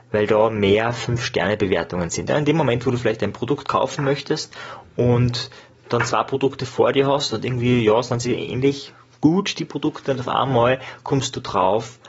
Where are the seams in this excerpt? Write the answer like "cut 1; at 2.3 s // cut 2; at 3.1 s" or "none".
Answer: cut 1; at 2.3 s